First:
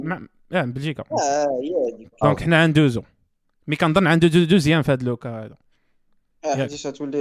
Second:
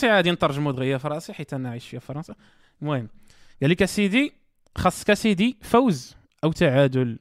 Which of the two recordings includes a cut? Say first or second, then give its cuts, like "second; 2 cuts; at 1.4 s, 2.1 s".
first; 1 cut; at 2.2 s